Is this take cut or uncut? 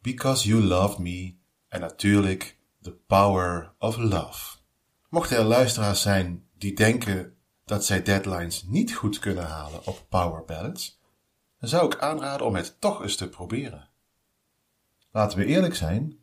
uncut